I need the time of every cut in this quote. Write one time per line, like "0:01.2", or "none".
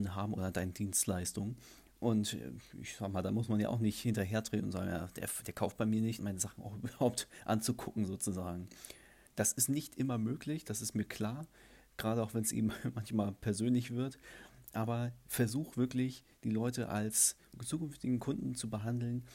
0:06.2
0:09.3